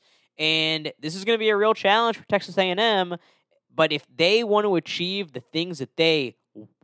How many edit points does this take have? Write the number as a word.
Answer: zero